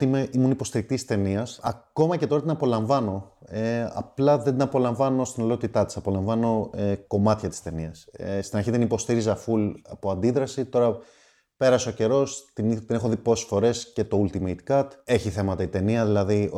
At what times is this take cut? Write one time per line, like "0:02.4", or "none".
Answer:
none